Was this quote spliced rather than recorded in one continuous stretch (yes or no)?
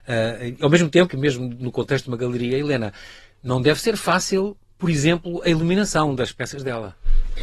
yes